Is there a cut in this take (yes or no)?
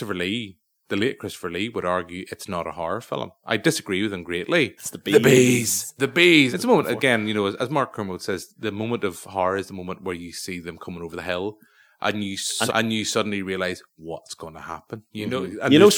yes